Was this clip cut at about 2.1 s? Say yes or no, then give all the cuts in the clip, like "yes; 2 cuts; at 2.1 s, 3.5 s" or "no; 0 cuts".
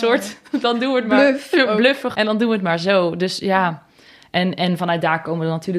yes; 1 cut; at 2.1 s